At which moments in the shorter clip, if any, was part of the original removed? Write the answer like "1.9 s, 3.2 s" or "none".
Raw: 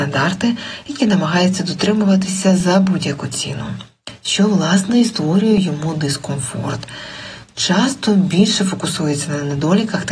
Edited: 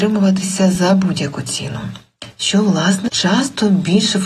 3.1 s